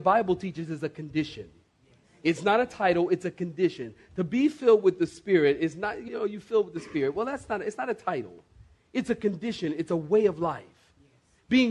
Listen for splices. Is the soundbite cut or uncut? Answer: cut